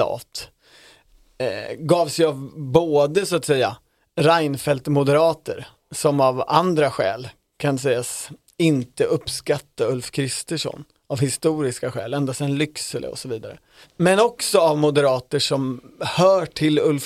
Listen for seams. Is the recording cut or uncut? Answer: uncut